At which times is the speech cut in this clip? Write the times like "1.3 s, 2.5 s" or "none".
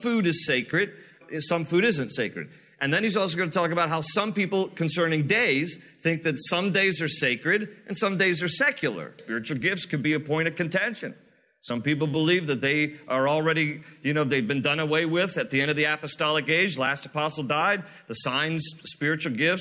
9.2 s